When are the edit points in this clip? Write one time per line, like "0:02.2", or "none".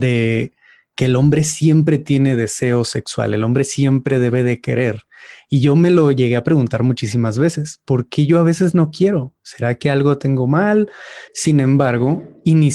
0:11.3

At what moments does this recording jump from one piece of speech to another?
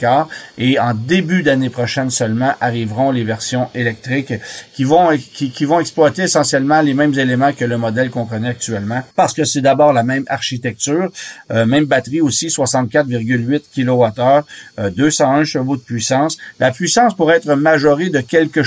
0:09.1

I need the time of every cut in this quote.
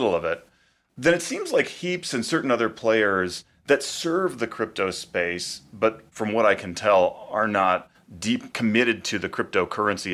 0:08.5

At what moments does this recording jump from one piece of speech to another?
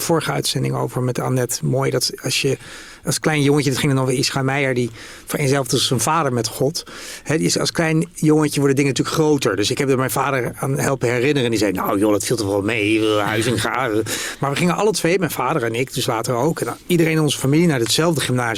none

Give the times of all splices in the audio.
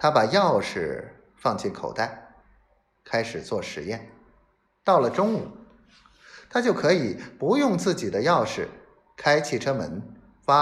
0:04.7

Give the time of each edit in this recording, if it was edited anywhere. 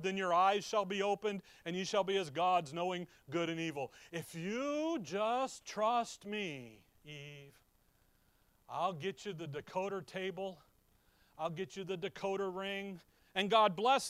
0:13.2

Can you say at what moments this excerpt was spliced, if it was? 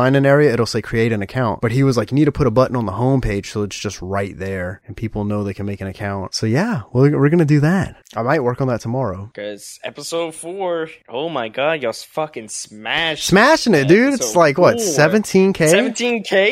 none

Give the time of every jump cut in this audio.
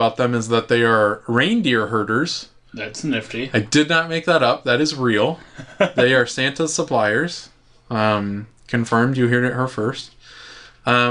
none

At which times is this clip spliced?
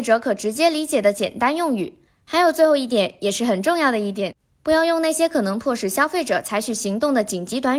none

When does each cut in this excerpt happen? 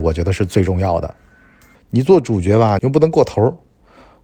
0:01.7
0:02.8

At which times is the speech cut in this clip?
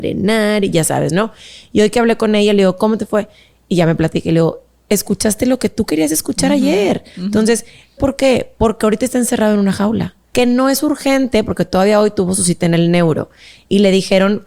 0:08.0
0:10.3

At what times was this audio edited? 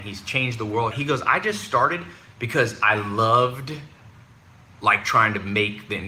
0:00.9

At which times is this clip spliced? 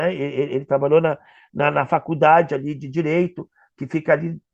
none

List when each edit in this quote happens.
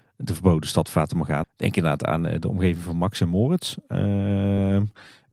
0:01.4

